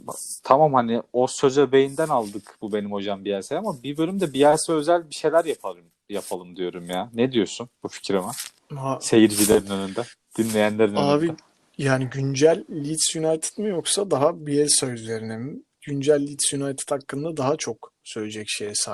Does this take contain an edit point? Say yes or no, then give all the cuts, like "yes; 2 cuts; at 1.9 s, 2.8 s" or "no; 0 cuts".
no; 0 cuts